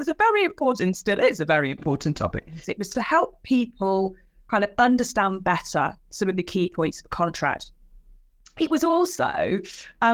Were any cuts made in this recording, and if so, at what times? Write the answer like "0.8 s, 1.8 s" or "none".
2.6 s